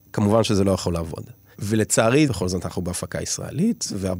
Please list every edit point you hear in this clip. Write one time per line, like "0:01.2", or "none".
0:02.3